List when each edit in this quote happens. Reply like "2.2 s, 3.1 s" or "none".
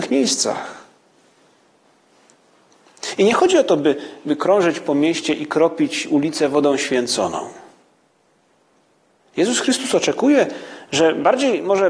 none

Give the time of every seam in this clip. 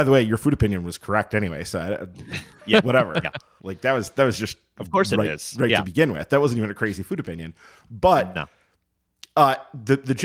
none

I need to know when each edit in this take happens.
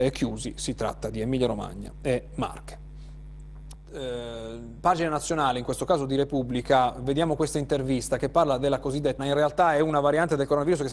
3.7 s, 9.2 s

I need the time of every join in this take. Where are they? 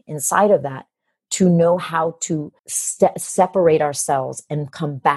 2.6 s

